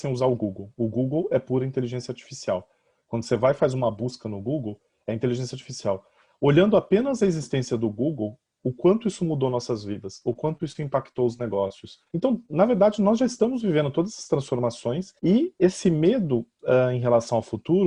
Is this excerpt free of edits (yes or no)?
no